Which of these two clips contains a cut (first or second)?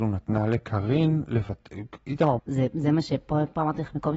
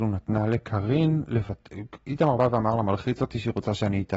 first